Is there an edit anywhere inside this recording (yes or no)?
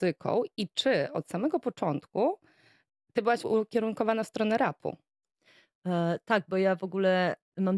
no